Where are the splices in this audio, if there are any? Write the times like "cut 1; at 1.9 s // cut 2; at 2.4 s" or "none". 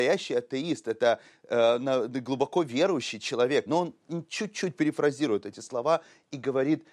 cut 1; at 3.7 s